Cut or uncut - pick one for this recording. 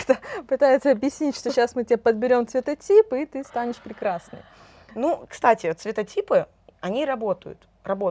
uncut